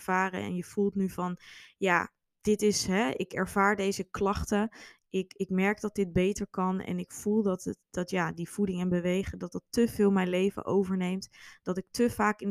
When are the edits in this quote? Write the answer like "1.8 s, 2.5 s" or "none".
none